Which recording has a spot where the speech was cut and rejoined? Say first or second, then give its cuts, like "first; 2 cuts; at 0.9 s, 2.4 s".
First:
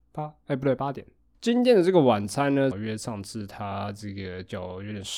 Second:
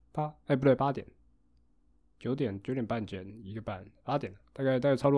first; 2 cuts; at 1.3 s, 2.7 s